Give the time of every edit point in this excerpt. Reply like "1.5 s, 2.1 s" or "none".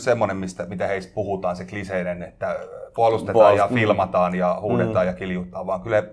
none